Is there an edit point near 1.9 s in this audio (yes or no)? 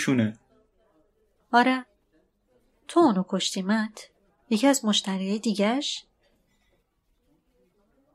no